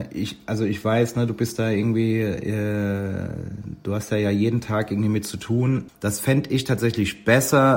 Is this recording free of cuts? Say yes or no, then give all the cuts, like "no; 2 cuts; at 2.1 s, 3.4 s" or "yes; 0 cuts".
no; 1 cut; at 5.9 s